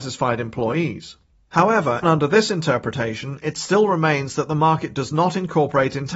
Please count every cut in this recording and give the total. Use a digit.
1